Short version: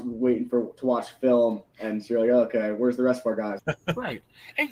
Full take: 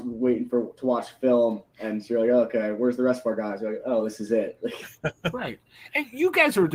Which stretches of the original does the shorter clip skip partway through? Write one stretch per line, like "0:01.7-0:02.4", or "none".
0:03.6-0:05.0